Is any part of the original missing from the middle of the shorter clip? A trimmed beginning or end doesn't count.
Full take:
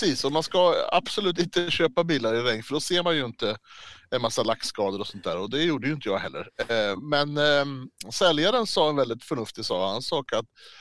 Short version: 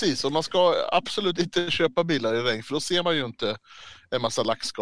no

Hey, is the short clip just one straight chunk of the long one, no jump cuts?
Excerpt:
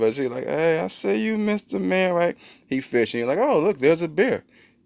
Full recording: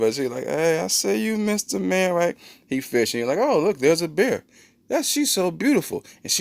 yes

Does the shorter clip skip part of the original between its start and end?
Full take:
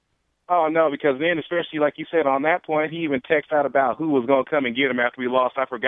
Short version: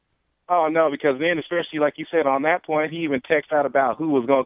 no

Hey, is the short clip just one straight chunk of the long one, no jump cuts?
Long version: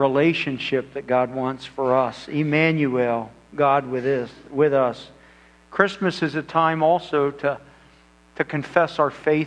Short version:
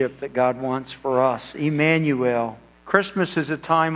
no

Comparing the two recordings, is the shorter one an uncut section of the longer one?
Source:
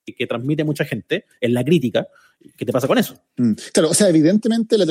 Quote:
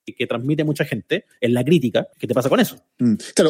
no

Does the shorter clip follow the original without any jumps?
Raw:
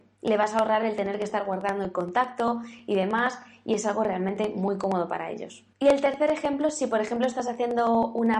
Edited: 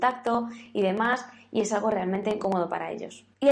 no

